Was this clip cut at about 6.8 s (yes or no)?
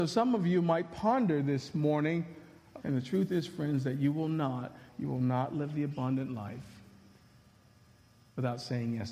no